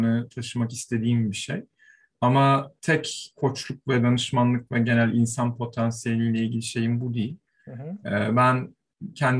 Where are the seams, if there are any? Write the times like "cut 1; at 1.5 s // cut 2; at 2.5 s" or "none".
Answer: none

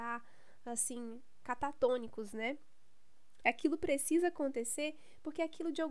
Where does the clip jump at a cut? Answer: cut 1; at 3.4 s

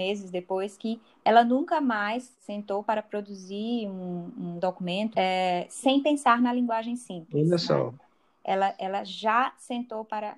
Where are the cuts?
cut 1; at 5.1 s

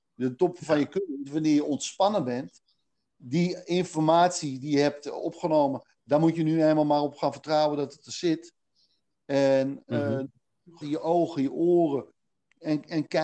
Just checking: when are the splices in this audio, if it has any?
cut 1; at 10.8 s

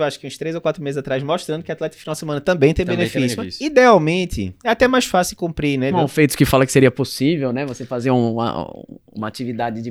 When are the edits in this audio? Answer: cut 1; at 5.9 s

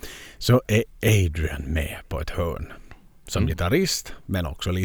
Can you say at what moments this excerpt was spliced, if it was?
none

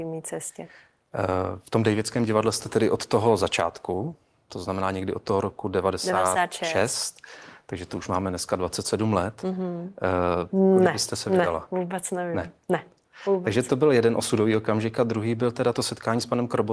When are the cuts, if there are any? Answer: cut 1; at 10.5 s

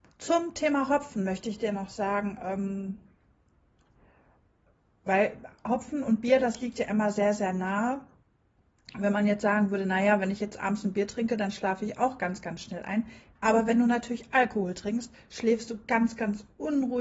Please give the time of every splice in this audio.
cut 1; at 13.4 s

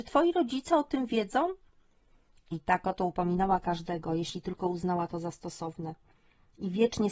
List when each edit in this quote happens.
none

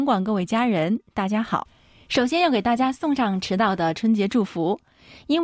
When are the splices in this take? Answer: none

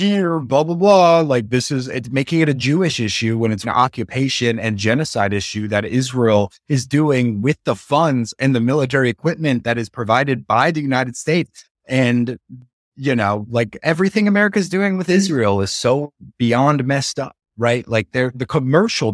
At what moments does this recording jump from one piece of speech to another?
cut 1; at 3.6 s // cut 2; at 11.7 s

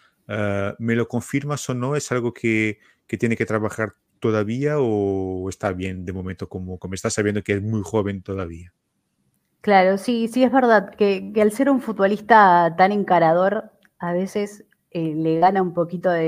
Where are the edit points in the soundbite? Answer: none

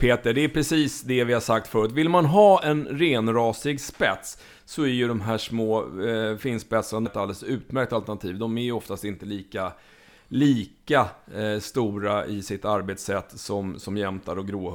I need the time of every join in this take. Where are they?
cut 1; at 7.1 s

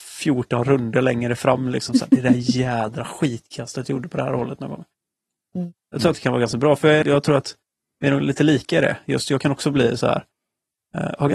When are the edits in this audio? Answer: cut 1; at 7.0 s

